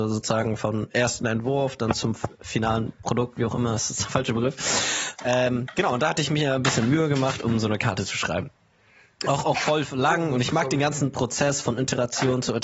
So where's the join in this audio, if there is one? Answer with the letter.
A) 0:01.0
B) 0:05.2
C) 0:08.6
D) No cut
B